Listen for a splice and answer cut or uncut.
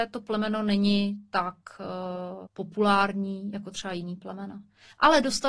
cut